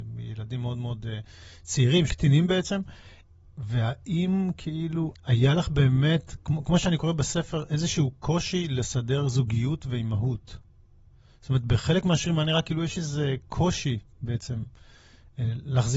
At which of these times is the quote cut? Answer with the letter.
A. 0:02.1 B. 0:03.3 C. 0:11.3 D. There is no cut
A